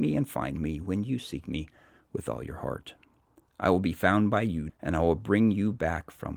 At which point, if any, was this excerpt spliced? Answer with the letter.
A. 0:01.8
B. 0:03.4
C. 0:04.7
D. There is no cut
C